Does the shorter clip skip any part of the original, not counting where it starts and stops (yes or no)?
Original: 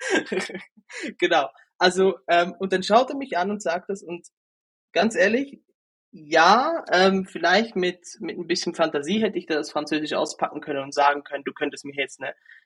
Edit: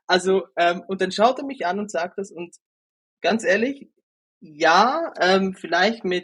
no